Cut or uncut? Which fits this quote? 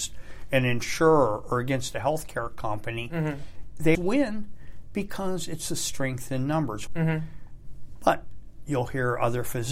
cut